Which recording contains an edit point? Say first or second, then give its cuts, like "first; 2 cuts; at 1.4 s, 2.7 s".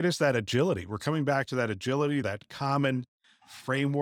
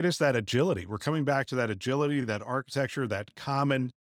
first; 1 cut; at 2.2 s